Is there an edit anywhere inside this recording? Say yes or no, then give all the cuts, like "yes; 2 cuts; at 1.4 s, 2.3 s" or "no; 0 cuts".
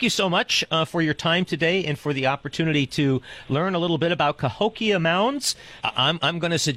yes; 1 cut; at 5.8 s